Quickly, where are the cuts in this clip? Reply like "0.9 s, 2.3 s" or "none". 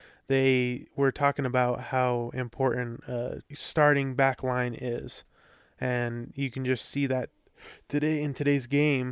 3.5 s